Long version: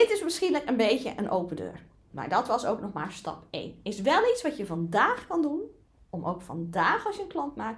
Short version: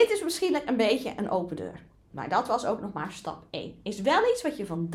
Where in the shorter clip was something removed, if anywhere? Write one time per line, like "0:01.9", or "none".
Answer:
none